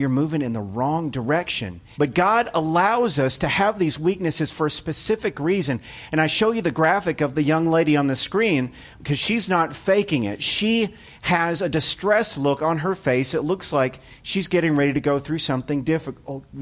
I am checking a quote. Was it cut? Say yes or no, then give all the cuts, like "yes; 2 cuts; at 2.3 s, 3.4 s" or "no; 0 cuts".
yes; 1 cut; at 1.9 s